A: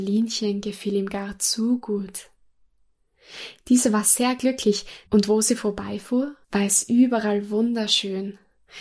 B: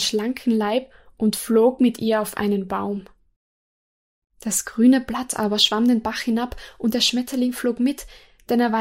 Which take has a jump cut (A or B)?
A